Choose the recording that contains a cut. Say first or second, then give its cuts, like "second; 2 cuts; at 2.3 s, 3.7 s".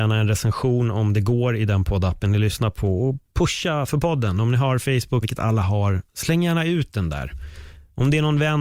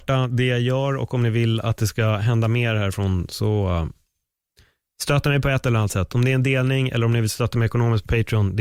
first; 2 cuts; at 3.9 s, 5.2 s